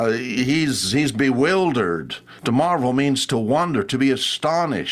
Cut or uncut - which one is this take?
uncut